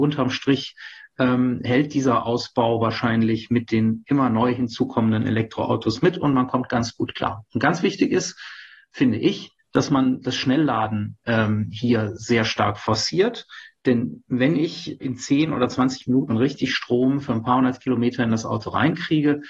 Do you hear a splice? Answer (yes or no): yes